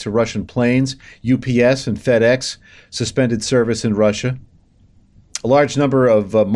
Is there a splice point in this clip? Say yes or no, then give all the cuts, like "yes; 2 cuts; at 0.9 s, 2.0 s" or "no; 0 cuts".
no; 0 cuts